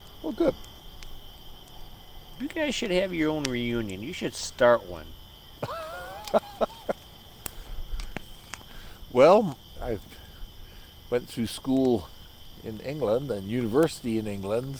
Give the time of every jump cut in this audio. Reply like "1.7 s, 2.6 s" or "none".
9.8 s